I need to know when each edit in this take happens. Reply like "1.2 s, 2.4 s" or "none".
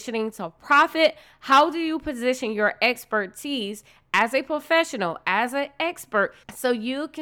none